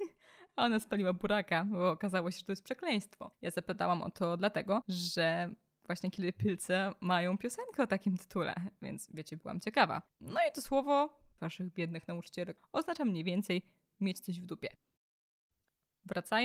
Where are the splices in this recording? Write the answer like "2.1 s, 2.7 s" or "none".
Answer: 11.4 s, 12.6 s